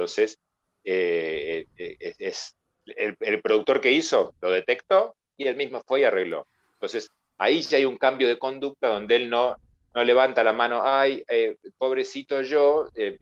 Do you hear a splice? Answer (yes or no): no